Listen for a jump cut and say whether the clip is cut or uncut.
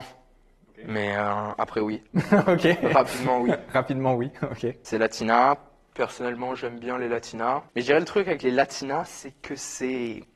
uncut